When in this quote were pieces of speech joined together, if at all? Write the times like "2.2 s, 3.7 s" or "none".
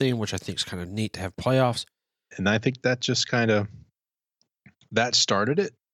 2.3 s